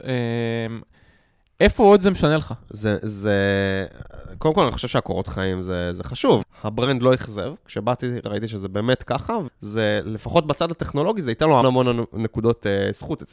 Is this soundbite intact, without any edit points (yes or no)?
no